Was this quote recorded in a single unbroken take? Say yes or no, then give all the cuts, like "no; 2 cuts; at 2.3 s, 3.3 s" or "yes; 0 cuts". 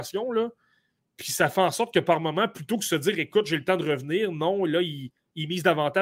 yes; 0 cuts